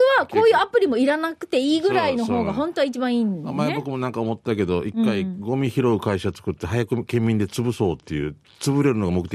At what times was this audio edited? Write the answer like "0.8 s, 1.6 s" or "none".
none